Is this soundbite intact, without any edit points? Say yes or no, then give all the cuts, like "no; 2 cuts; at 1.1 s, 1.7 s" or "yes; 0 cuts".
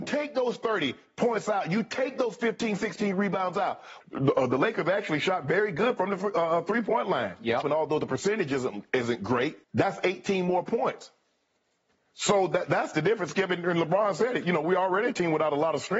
no; 3 cuts; at 4.0 s, 7.6 s, 9.6 s